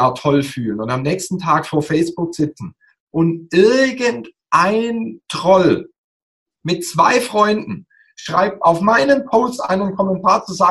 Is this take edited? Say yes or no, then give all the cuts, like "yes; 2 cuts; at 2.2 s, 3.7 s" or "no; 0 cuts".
no; 0 cuts